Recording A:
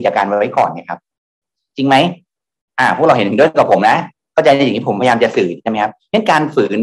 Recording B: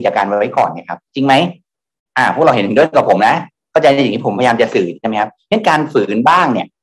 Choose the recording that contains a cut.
B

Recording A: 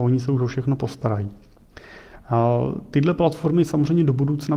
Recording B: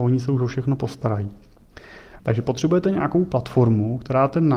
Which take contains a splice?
B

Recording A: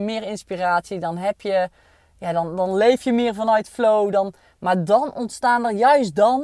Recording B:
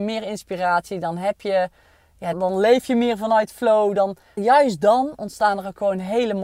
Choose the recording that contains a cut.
B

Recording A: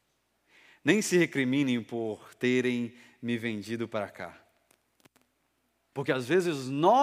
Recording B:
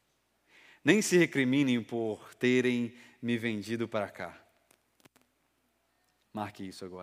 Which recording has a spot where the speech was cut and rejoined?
A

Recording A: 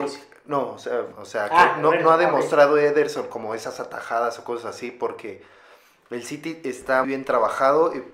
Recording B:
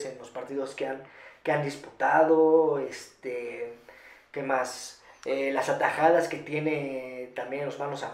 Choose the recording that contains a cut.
A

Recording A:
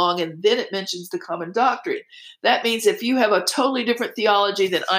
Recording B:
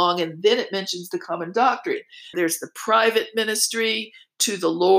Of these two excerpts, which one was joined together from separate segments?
B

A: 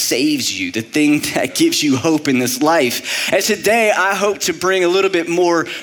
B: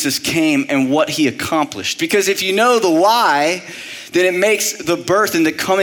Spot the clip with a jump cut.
A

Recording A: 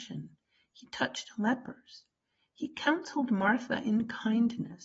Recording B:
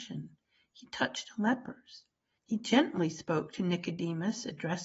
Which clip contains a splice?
B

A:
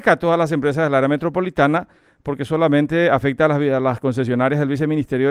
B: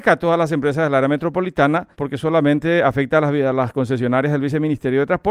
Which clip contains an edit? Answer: B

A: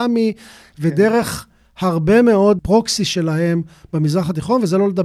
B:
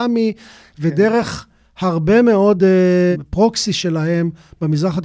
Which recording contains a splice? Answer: A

